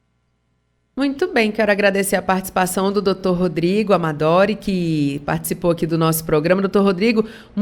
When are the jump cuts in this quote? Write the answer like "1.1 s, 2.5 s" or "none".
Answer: none